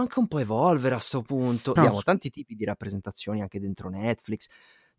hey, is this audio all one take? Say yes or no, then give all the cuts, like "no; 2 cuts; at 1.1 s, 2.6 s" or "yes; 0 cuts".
no; 1 cut; at 1.8 s